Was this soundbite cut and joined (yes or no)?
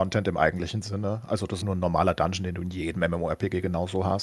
yes